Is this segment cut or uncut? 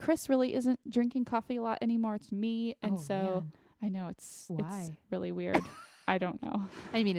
cut